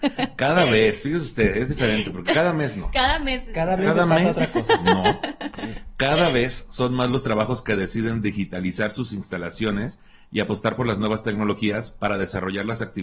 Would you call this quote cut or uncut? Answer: uncut